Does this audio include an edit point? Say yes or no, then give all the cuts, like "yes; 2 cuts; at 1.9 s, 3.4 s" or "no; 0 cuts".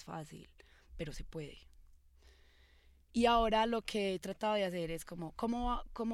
no; 0 cuts